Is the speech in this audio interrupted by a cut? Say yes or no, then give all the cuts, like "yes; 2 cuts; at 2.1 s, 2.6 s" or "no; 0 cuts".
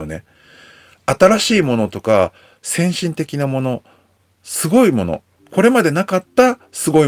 no; 0 cuts